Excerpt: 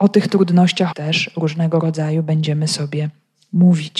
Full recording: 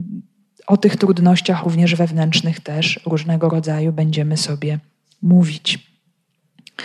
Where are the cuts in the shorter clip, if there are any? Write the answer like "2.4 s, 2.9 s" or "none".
0.9 s